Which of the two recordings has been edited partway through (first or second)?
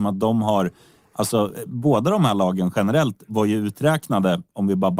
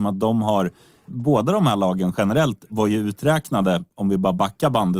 second